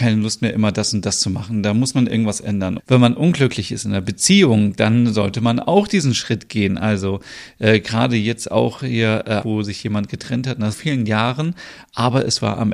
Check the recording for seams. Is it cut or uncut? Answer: cut